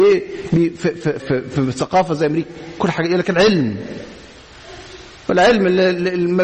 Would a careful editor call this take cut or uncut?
cut